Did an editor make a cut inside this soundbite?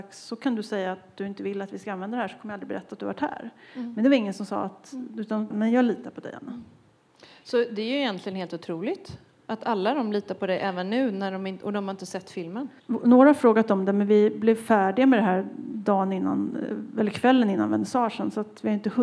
yes; 2 cuts; at 5.5 s, 12.8 s

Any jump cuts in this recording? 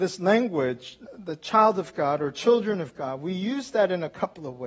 yes; 1 cut; at 1.1 s

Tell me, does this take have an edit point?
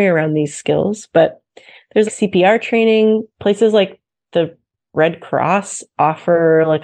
yes; 2 cuts; at 2.1 s, 3.3 s

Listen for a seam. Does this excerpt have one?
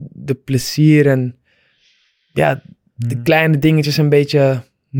no; 0 cuts

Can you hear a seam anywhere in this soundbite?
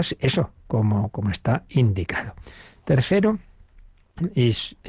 no; 0 cuts

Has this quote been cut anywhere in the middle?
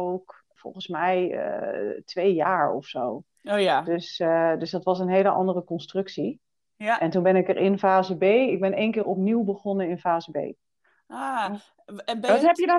no; 0 cuts

